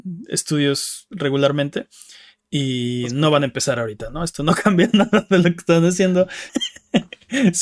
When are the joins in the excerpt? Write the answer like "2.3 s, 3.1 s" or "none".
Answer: 6.5 s